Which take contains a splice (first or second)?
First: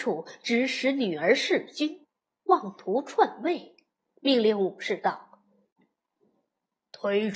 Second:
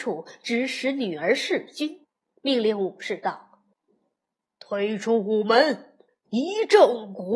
second